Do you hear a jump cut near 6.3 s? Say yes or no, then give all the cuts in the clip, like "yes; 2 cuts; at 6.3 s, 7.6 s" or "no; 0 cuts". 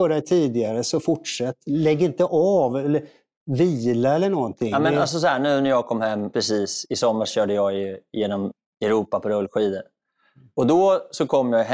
yes; 1 cut; at 6.3 s